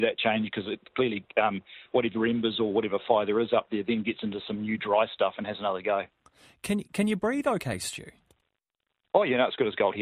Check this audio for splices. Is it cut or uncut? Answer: uncut